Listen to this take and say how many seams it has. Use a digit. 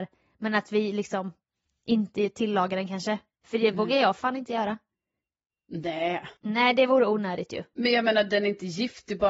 2